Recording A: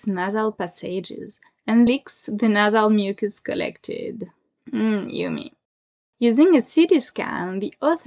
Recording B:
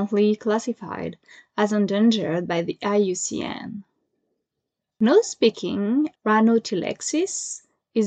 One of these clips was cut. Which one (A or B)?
A